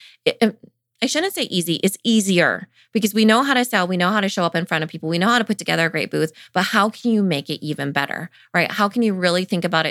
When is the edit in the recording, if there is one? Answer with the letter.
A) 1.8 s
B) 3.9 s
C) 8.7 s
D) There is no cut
D